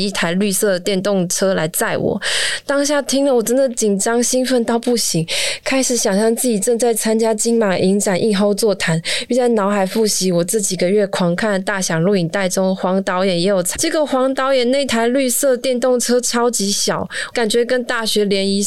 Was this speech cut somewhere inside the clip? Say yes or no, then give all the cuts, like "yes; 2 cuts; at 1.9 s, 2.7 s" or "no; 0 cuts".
yes; 2 cuts; at 13.7 s, 17.3 s